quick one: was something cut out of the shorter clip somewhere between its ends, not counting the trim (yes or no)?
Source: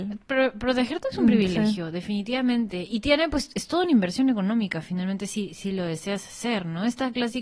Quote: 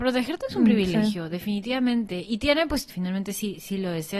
yes